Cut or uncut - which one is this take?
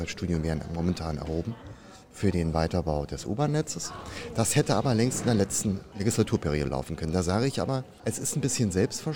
uncut